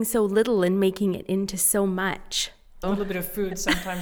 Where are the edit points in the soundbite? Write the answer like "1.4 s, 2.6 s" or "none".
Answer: 2.8 s